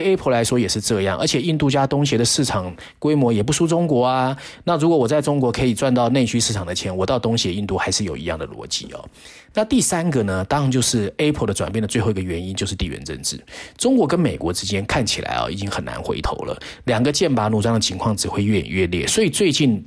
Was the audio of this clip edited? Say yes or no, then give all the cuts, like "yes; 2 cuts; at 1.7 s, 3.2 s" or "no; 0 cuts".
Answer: no; 0 cuts